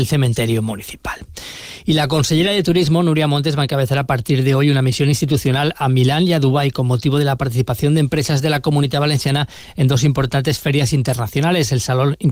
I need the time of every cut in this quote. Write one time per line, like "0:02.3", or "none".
none